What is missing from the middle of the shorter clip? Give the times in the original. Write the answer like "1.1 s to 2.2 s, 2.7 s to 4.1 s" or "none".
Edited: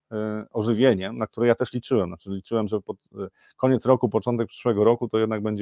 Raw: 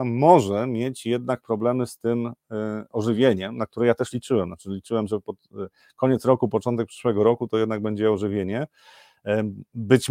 none